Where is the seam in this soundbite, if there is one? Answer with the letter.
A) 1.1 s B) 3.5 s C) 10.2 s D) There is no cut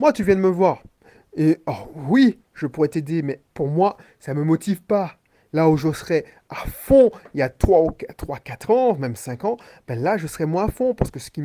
B